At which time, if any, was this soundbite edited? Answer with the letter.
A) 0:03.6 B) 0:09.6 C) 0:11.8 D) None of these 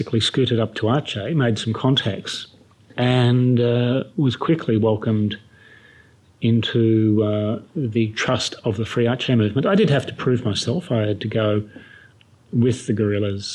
D